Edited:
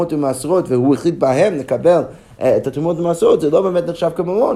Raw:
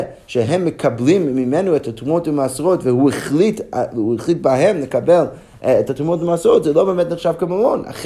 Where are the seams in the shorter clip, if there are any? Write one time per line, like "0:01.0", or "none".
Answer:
0:01.0